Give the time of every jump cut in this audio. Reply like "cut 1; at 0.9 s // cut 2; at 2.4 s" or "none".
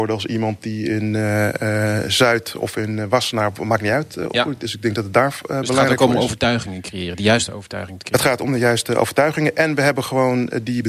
none